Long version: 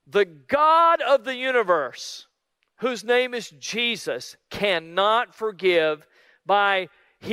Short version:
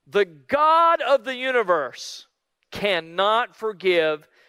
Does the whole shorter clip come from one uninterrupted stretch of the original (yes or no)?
no